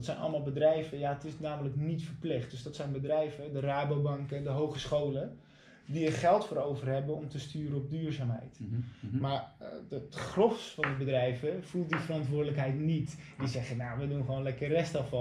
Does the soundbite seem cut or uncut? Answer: uncut